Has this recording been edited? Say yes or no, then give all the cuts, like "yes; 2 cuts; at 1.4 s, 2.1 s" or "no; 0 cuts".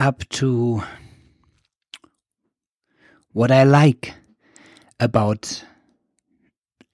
no; 0 cuts